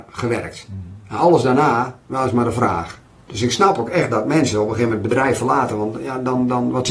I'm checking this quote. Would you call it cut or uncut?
uncut